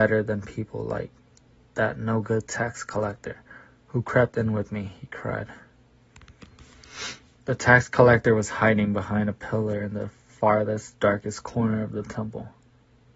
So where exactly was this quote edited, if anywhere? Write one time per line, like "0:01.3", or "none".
none

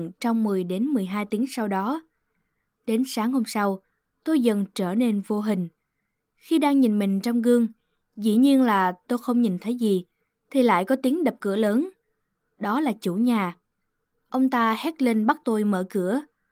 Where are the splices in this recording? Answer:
none

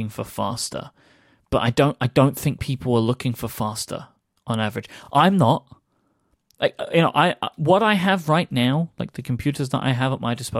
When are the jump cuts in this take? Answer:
none

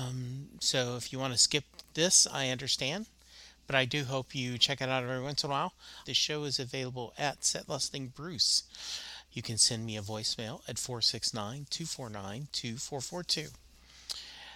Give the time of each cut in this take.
0:06.0
0:09.2

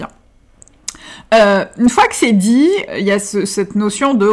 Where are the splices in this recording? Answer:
0:02.9

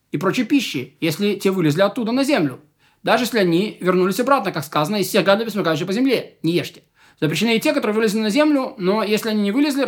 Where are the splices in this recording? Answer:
none

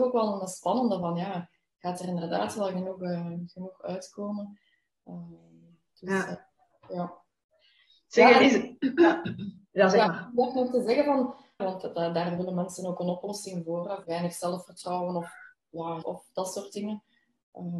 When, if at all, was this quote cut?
0:11.6
0:14.0
0:16.0

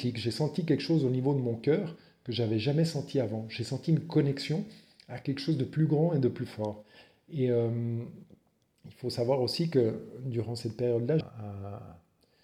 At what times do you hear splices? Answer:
0:11.2

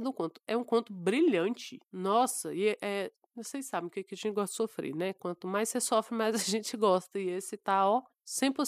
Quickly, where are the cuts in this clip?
none

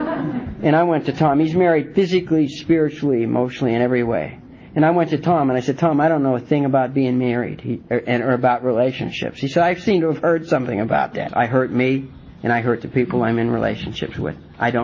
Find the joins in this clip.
0:11.3

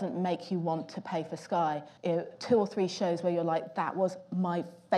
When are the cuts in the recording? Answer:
0:02.0

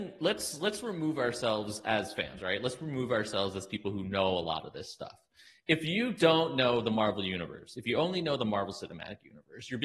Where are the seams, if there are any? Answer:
none

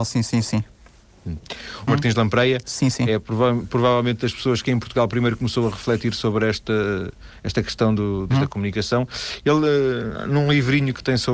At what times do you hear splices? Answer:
0:01.9
0:08.3

